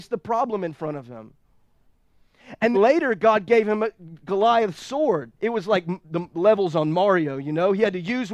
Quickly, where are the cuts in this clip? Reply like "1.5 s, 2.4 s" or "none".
2.7 s, 5.4 s